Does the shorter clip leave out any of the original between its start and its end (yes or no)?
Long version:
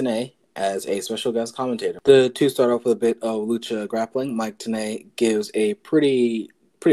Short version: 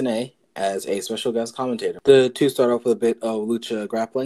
no